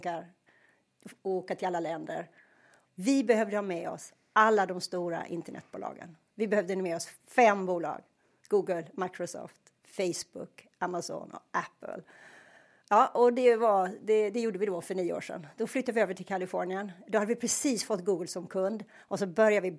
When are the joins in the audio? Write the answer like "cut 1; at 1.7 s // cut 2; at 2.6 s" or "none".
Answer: cut 1; at 2.9 s